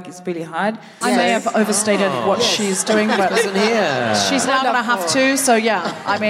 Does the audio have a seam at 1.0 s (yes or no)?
yes